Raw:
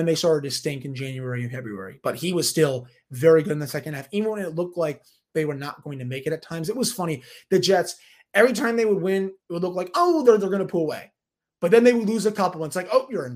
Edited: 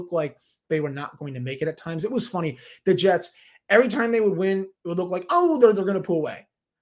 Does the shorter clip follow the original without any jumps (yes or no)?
yes